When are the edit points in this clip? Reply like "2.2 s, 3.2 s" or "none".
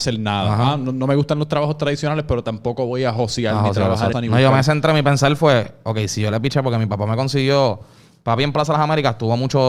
4.1 s